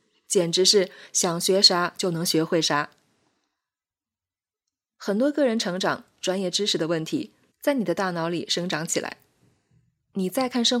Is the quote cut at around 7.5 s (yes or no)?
yes